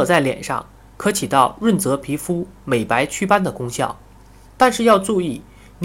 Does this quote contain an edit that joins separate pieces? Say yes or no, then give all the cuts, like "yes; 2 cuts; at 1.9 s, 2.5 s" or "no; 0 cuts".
yes; 1 cut; at 4.5 s